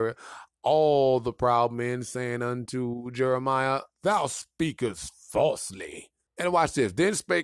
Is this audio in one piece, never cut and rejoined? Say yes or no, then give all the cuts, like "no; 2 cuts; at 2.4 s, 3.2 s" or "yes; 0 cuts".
no; 1 cut; at 6.3 s